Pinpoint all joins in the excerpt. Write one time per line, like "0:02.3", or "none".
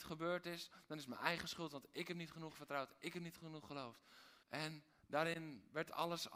0:04.4